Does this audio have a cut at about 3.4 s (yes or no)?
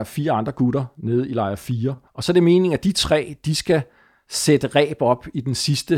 no